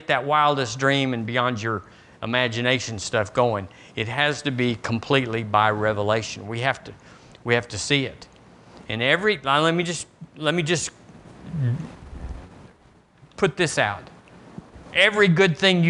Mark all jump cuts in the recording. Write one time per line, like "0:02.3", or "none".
none